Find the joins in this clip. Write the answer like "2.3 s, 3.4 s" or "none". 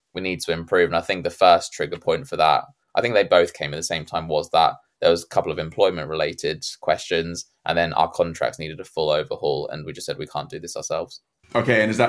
none